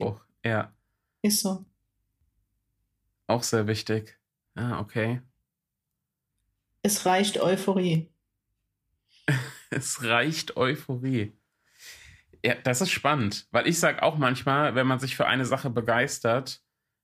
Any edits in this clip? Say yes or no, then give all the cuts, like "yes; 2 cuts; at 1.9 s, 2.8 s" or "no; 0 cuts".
yes; 1 cut; at 4.5 s